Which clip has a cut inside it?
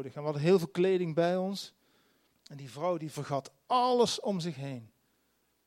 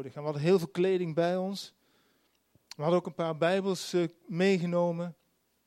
first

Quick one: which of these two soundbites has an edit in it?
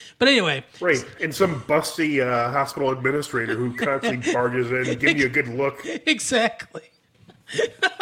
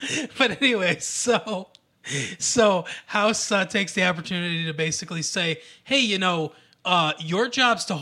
first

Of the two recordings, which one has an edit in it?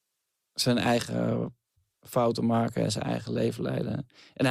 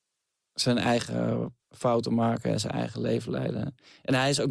second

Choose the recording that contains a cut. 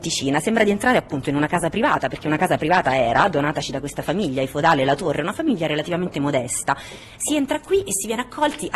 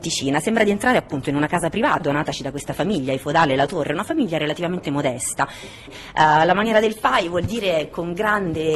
second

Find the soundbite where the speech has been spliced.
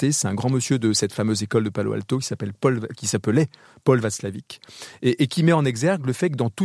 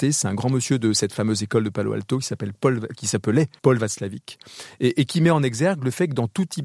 second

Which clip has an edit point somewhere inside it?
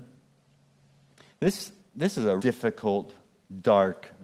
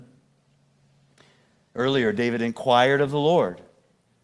first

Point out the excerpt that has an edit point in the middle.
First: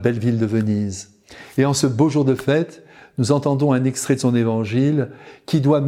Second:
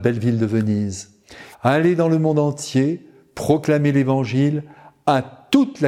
second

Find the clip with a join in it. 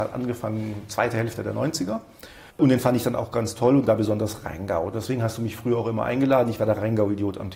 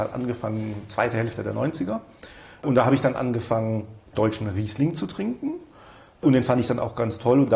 first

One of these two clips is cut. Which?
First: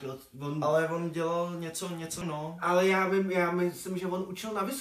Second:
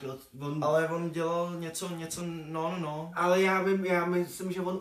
first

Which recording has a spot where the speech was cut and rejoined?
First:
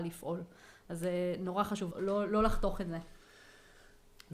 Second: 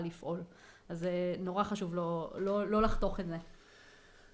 first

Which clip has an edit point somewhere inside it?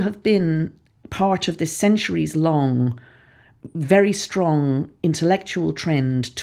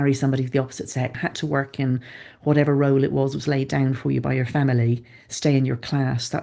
second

